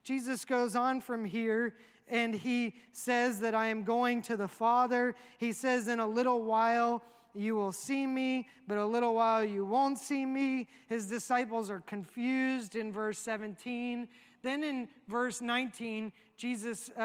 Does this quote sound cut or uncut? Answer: uncut